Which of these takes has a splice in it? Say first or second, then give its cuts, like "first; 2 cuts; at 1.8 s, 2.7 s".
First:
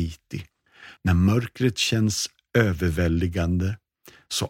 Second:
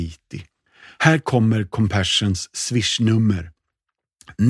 first; 1 cut; at 1.0 s